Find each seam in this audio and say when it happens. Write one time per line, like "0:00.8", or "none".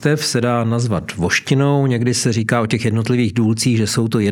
none